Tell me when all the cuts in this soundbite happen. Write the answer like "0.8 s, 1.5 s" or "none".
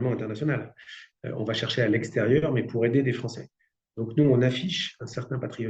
none